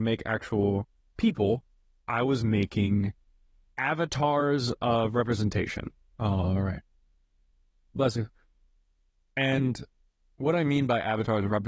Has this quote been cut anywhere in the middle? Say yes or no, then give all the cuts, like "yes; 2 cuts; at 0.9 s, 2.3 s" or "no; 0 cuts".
yes; 1 cut; at 6.1 s